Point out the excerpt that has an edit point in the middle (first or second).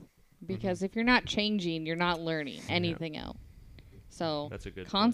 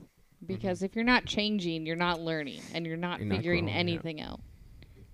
first